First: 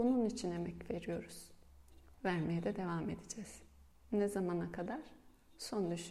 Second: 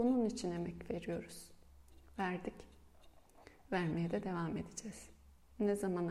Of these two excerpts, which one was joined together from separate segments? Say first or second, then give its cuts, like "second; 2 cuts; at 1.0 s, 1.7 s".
first; 1 cut; at 2.1 s